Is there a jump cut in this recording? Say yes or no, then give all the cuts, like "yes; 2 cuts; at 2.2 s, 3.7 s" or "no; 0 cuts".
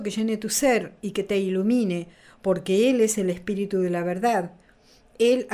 no; 0 cuts